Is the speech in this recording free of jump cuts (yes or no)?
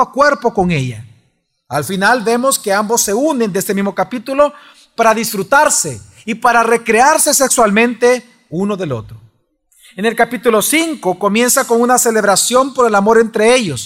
yes